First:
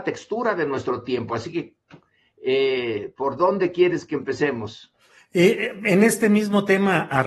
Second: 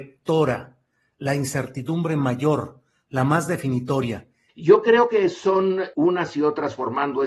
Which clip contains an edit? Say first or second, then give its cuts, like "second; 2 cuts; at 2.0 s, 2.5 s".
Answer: second; 2 cuts; at 4.5 s, 5.9 s